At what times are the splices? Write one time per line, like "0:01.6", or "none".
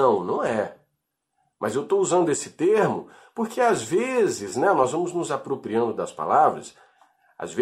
none

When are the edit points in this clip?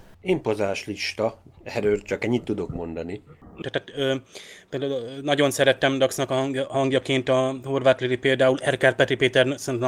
0:03.6

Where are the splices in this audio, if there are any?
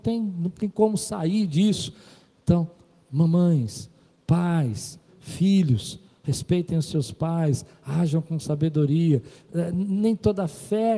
0:05.1

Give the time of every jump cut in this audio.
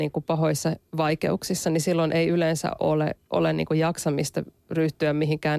none

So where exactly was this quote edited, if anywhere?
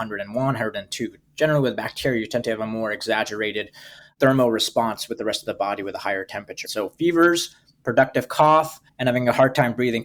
0:06.6
0:08.9

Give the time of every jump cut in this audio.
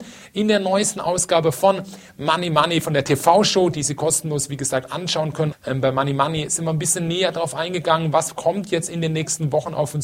0:05.5

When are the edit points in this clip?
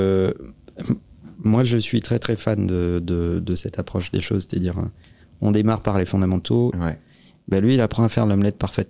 0:06.7

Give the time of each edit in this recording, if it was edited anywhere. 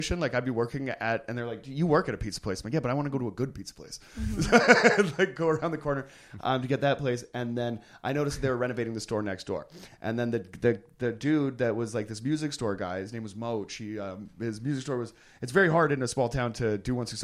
none

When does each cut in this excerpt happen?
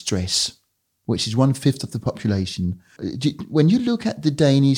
0:03.0

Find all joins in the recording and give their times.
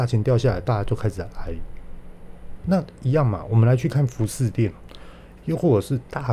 0:02.6
0:05.4

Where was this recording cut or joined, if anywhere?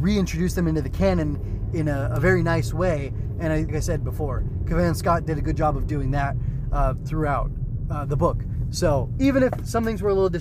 0:03.7

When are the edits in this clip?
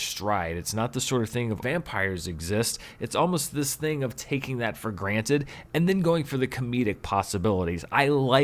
0:01.6

